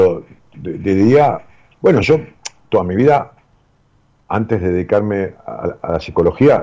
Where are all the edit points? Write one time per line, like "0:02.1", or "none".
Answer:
none